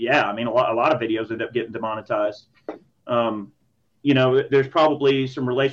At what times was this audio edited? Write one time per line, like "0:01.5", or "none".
0:02.9